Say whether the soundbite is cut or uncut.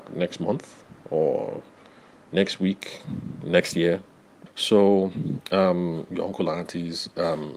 cut